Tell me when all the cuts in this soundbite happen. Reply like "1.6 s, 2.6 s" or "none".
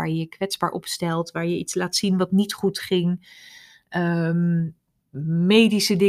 none